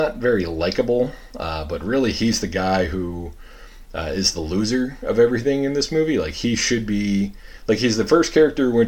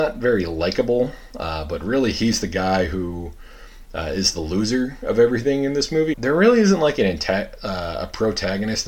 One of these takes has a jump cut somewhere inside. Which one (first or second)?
second